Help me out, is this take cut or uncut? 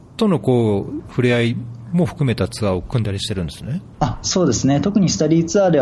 cut